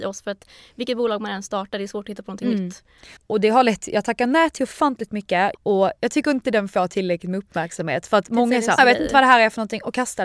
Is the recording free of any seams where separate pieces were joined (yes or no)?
no